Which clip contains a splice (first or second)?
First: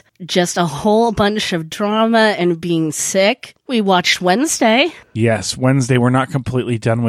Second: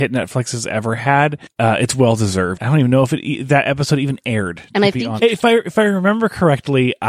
second